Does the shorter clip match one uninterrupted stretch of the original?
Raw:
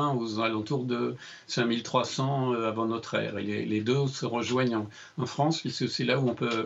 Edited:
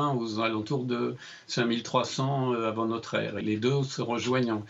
no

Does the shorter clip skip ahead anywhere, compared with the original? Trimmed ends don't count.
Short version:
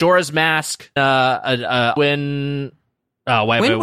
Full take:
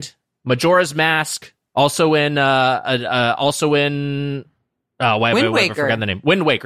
yes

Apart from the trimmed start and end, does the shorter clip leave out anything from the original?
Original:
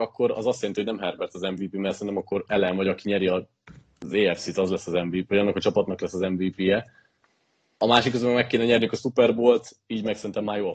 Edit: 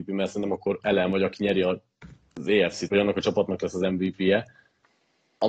yes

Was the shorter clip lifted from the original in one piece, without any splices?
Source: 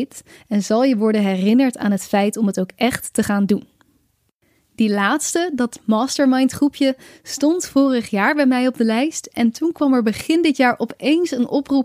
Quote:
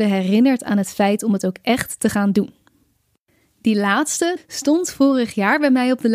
no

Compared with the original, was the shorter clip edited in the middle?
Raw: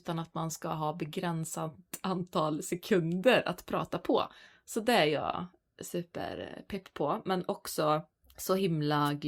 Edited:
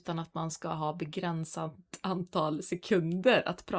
no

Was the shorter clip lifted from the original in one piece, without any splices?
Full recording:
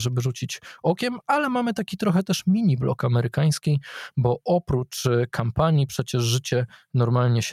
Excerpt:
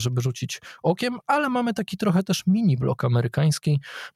yes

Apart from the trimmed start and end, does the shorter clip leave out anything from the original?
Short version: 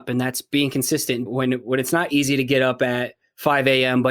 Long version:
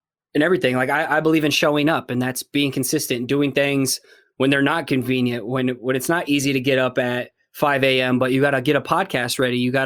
yes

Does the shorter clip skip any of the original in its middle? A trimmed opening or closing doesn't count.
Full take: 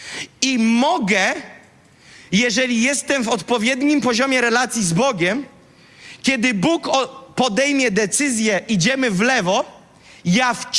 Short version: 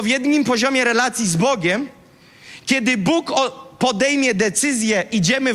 no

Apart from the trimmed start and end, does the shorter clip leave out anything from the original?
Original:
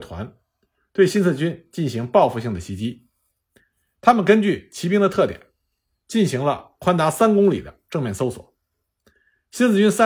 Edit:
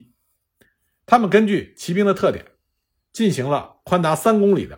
no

